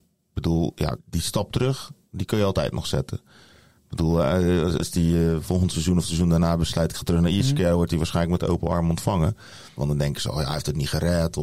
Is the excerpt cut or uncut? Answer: cut